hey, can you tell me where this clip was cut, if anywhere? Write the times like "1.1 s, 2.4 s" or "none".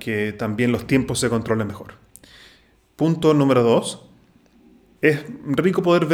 5.0 s